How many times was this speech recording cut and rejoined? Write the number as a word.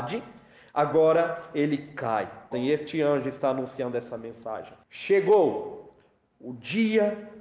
two